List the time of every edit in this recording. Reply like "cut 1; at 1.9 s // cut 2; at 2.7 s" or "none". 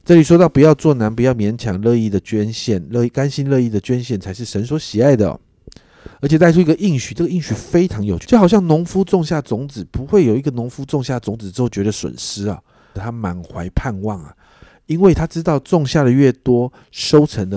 cut 1; at 8.2 s // cut 2; at 12.9 s

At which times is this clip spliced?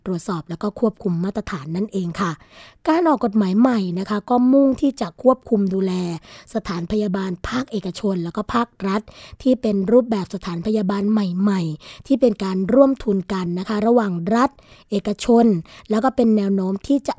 none

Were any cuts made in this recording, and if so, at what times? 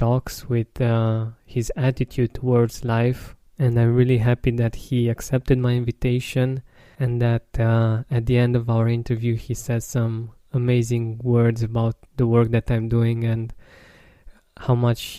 cut 1; at 3.5 s // cut 2; at 7.0 s

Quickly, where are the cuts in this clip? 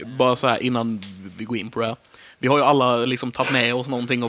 none

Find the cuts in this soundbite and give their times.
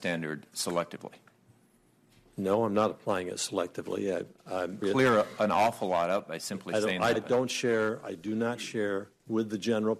cut 1; at 4.8 s // cut 2; at 7.1 s

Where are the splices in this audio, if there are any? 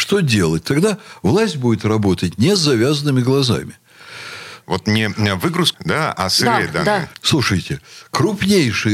cut 1; at 4.6 s // cut 2; at 5.7 s // cut 3; at 7.1 s

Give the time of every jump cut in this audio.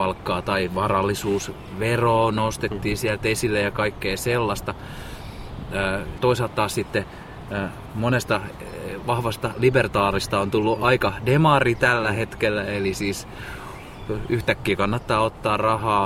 cut 1; at 6.2 s

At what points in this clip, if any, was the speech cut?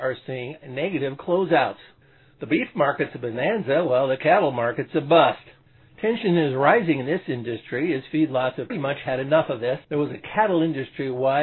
cut 1; at 8.7 s // cut 2; at 9.8 s

